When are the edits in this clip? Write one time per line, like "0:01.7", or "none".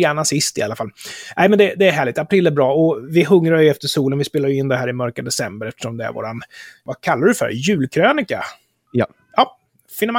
none